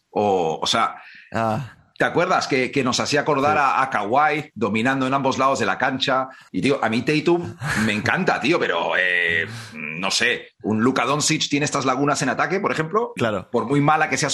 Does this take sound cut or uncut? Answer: cut